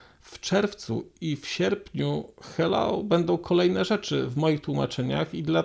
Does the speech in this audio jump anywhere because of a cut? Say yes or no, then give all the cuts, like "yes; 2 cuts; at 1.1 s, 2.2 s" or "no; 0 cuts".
no; 0 cuts